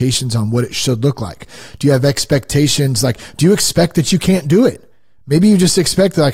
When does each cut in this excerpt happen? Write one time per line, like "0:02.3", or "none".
none